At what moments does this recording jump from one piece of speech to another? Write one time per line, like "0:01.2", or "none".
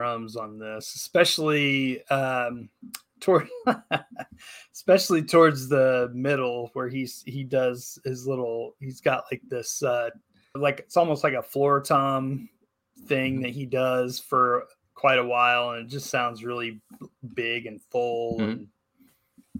0:10.5